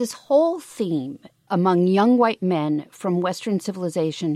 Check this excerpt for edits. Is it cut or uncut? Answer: cut